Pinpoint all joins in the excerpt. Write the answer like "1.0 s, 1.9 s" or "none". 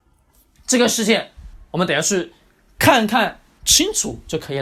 none